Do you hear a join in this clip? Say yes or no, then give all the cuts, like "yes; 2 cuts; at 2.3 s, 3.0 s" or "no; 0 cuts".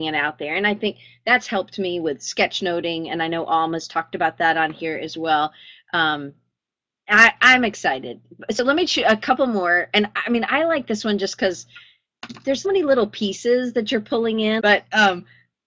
yes; 2 cuts; at 12.6 s, 14.6 s